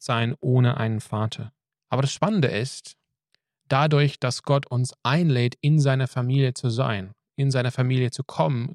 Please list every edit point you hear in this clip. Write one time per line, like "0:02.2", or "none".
0:01.8